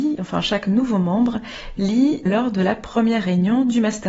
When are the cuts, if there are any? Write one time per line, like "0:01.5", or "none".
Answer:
0:02.3